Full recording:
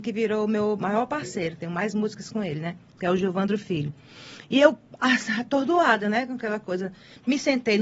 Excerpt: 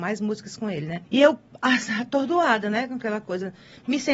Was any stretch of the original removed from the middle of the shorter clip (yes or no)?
yes